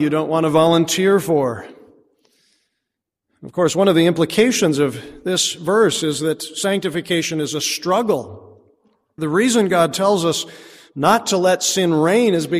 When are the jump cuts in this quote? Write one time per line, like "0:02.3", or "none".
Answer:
none